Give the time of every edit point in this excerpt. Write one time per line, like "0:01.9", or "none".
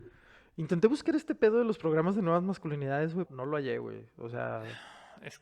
0:03.3

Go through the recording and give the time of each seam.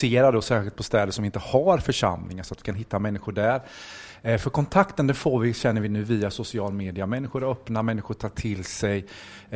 none

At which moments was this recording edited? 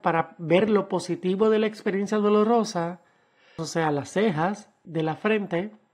0:03.6
0:04.9

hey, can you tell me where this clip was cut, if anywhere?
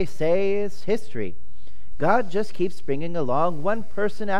none

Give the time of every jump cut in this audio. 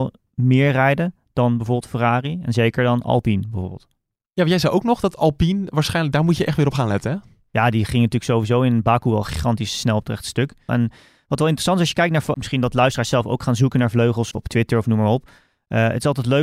0:10.7
0:12.3
0:14.3

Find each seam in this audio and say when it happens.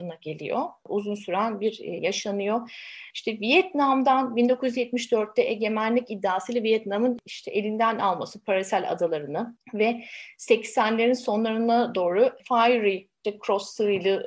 0:02.0
0:03.1

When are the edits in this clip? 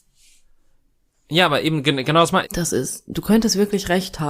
0:02.4

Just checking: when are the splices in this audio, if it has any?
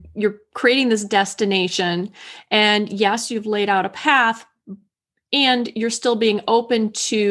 none

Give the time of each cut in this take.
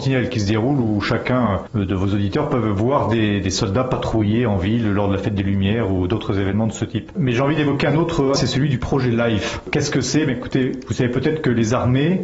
0:08.4

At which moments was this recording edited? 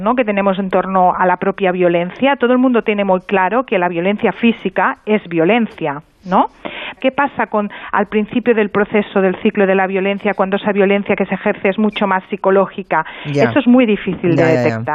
0:07.0

